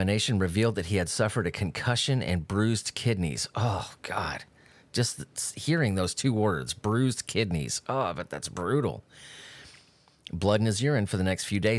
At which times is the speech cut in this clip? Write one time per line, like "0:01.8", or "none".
none